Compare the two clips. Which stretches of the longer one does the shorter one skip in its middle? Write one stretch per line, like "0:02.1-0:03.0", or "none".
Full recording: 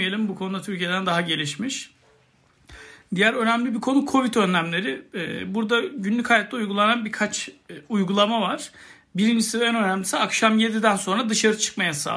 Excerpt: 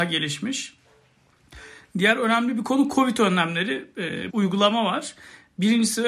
0:05.5-0:07.9